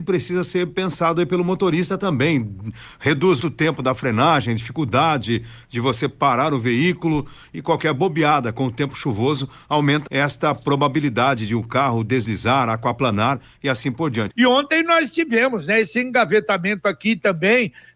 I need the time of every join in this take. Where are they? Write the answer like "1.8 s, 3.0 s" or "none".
3.4 s, 10.1 s, 14.3 s

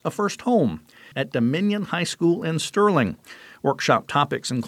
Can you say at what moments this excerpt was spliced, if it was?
1.1 s

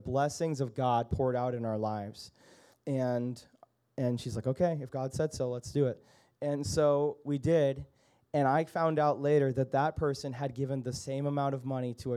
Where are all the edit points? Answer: 2.7 s

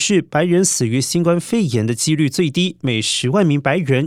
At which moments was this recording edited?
none

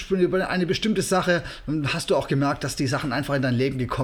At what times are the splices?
none

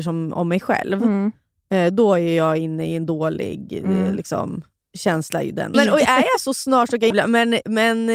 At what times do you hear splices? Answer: 5.7 s, 7.1 s

